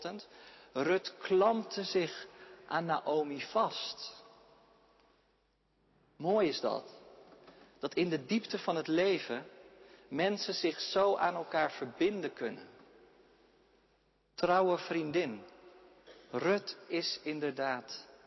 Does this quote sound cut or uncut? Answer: uncut